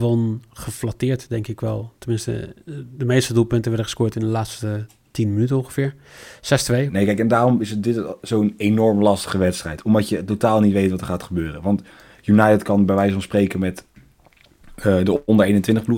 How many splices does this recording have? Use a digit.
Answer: 1